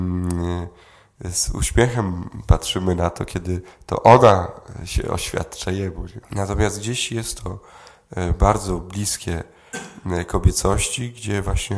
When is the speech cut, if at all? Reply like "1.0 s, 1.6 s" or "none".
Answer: 6.2 s